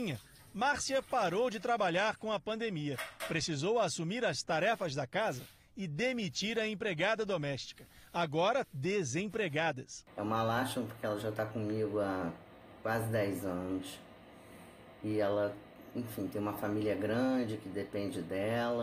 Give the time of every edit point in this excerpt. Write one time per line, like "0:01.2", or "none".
0:08.6